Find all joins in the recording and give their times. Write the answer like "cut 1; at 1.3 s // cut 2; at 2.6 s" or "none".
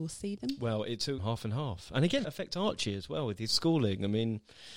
cut 1; at 1.2 s // cut 2; at 2.2 s